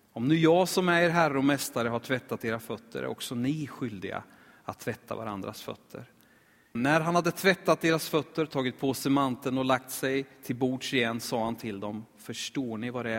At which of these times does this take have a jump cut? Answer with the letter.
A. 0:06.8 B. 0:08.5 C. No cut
A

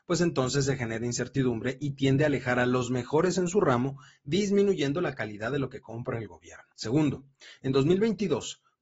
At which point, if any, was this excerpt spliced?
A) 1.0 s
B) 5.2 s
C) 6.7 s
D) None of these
C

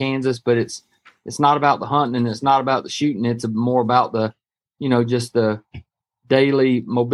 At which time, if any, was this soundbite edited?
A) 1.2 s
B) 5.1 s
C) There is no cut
C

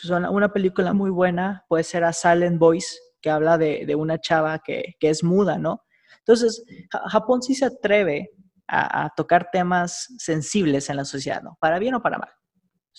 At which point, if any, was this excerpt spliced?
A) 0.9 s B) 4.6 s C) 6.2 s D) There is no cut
A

